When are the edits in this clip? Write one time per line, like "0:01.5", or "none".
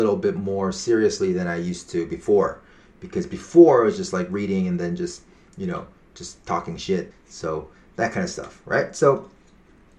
0:07.1